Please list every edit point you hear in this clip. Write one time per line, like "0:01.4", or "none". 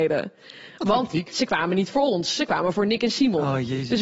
none